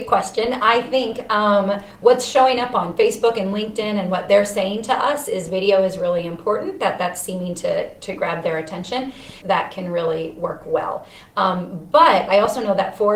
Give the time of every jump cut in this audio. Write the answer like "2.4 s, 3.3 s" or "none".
9.4 s